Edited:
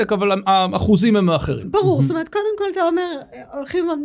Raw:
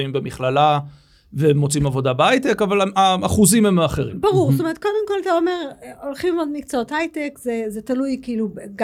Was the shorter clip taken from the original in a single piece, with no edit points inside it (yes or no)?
yes